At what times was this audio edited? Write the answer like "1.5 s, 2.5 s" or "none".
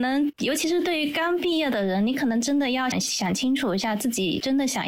2.9 s